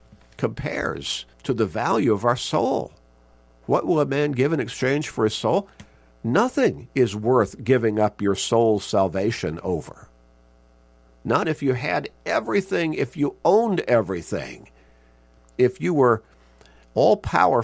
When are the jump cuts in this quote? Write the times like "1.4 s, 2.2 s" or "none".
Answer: 1.3 s, 11.4 s